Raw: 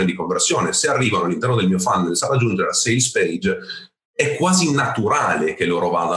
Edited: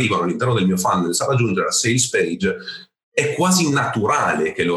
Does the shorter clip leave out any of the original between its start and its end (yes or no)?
no